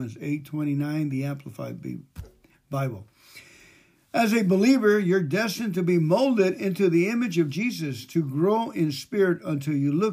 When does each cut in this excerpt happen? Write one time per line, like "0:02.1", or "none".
none